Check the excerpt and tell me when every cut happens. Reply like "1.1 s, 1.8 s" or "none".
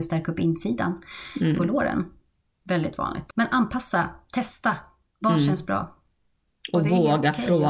none